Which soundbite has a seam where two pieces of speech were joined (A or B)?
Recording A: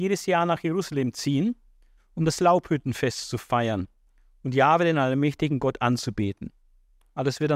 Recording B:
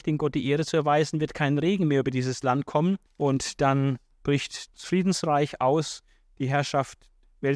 B